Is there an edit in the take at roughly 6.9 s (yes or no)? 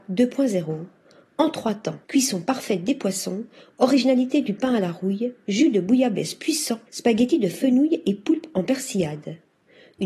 yes